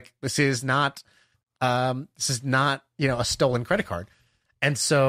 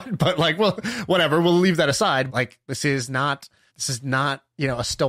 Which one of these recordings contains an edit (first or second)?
second